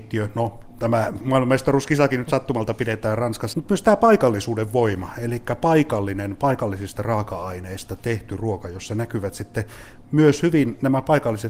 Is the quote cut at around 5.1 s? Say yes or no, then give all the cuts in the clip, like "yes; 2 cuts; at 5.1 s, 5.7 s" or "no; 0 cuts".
no; 1 cut; at 3.5 s